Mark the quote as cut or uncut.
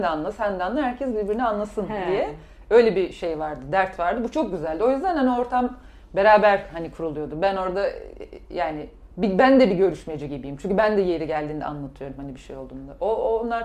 cut